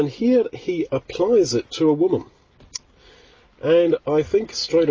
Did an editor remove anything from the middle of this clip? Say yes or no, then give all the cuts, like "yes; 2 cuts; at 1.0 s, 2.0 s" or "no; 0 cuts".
no; 0 cuts